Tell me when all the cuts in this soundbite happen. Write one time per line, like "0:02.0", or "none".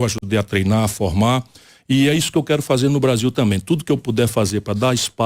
none